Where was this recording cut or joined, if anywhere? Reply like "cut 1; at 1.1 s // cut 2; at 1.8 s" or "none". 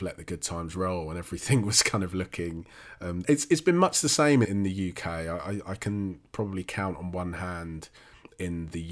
cut 1; at 3.2 s // cut 2; at 4.5 s